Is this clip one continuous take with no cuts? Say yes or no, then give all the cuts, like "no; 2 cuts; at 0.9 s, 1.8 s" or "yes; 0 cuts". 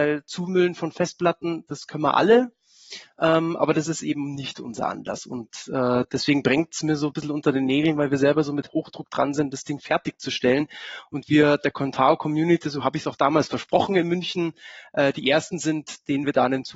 yes; 0 cuts